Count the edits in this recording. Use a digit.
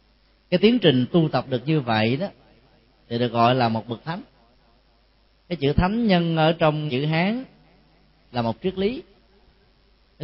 1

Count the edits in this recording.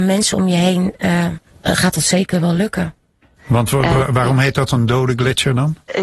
2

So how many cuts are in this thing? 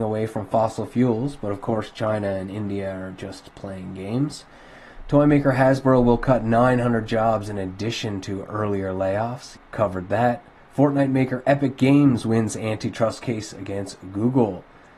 1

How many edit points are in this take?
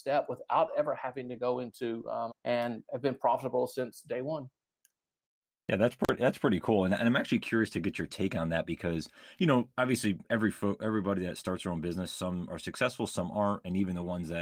1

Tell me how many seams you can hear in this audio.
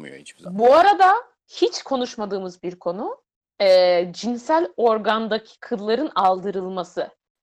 0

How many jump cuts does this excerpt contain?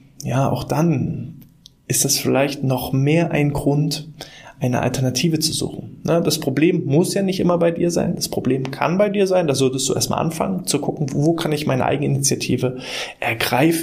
1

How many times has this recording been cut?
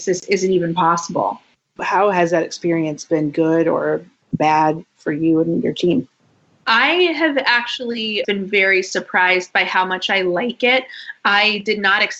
1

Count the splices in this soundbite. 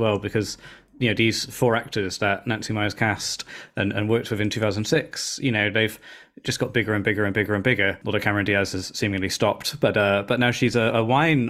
0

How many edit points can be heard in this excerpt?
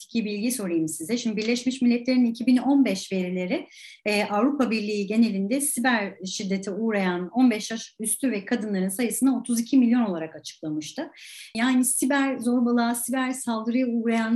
1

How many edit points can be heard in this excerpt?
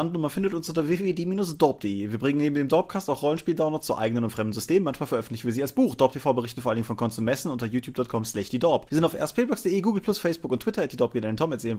0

